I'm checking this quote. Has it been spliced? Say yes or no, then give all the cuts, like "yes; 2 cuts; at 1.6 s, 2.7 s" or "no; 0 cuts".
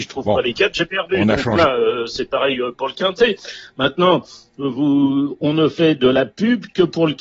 no; 0 cuts